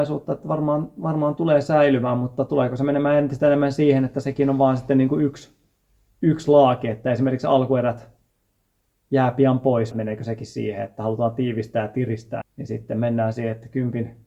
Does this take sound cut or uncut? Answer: cut